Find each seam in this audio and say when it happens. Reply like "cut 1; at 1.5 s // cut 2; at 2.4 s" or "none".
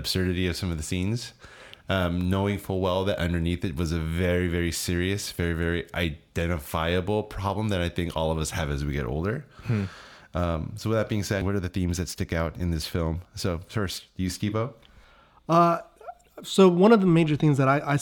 none